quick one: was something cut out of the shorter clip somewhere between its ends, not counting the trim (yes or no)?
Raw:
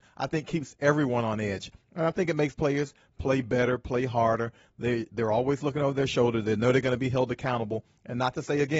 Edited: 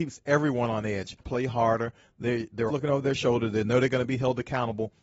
yes